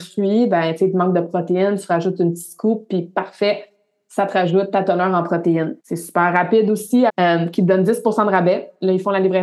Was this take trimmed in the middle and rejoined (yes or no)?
yes